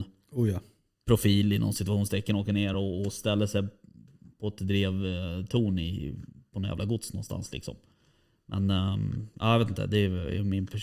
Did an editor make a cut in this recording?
no; 0 cuts

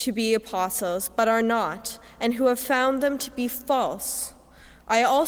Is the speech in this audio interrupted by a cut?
no; 0 cuts

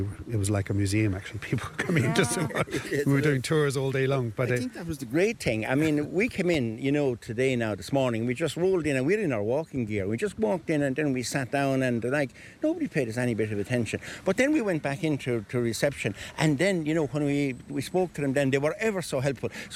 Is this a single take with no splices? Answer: yes; 0 cuts

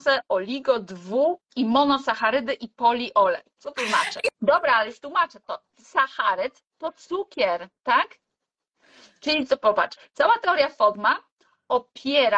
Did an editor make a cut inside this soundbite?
yes; 1 cut; at 4.3 s

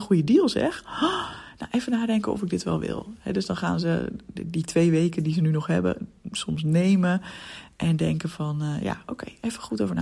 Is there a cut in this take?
no; 0 cuts

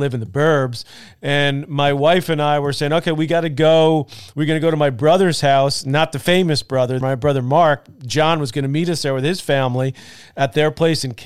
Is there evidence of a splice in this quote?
yes; 1 cut; at 7.0 s

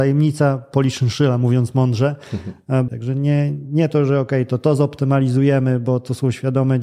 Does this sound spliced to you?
yes; 1 cut; at 2.9 s

